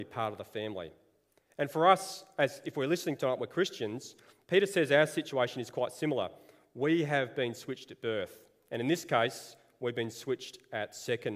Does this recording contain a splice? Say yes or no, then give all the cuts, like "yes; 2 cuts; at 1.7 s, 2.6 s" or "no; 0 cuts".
no; 0 cuts